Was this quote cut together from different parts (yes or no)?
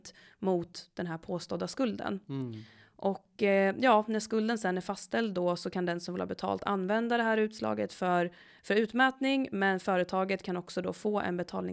no